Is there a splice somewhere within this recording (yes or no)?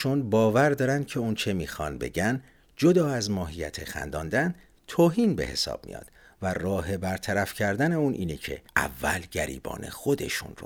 yes